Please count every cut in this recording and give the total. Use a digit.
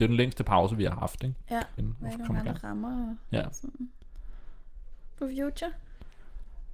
2